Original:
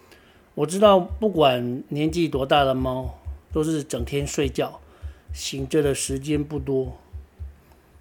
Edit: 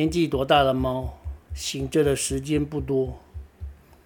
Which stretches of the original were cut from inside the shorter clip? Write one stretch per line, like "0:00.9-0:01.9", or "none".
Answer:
0:03.5-0:05.2

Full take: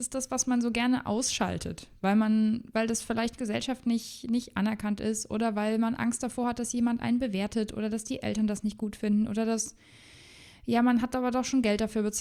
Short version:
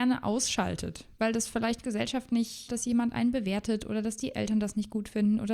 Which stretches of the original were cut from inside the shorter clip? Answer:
0:02.0-0:02.7
0:04.2-0:06.6

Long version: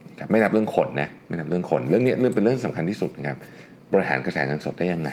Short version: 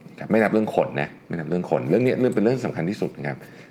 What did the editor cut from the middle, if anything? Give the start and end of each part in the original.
none

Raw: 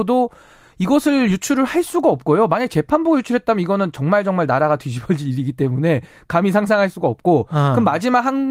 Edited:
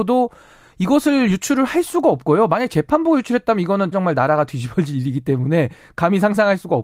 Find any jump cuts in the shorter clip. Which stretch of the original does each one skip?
0:03.9-0:04.2

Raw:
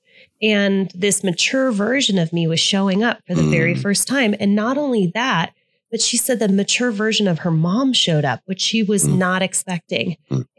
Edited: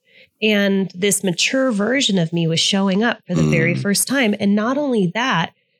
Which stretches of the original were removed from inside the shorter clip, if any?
none

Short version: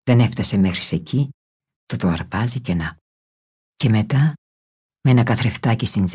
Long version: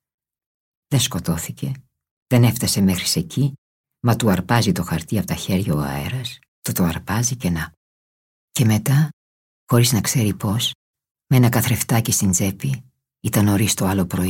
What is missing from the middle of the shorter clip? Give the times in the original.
0:04.0-0:06.5
0:09.6-0:11.1

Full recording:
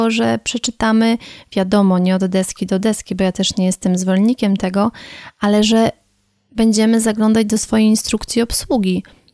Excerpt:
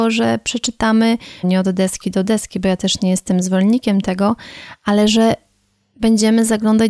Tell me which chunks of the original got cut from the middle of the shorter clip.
0:01.4-0:02.0

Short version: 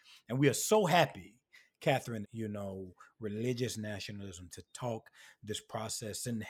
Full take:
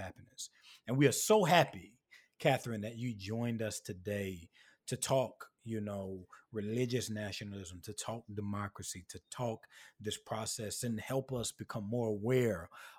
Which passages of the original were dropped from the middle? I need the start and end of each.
0:02.8-0:05.5
0:07.8-0:09.1

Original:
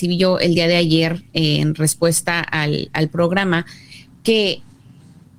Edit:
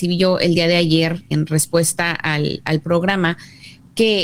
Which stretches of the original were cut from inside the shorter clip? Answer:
0:01.3-0:01.6

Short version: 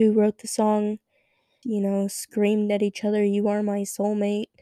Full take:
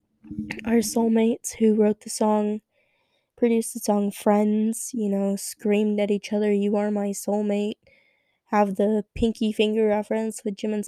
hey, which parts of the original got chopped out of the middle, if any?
0:03.2-0:04.9

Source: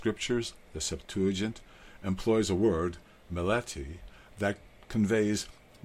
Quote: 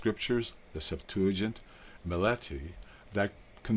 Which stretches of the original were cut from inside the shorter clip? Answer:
0:02.0-0:03.2

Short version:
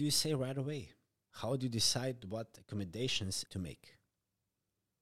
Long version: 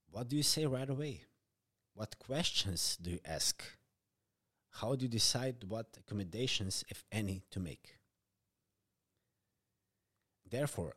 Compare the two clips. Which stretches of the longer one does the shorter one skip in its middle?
0:01.6-0:04.7
0:06.8-0:07.5

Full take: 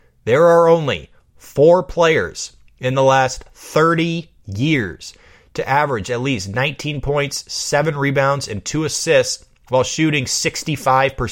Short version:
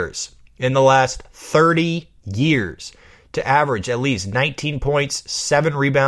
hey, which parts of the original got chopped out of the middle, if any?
none

